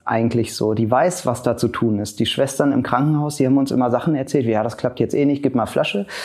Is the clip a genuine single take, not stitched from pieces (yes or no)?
yes